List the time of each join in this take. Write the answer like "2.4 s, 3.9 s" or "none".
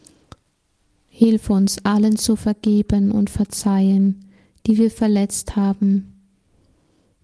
none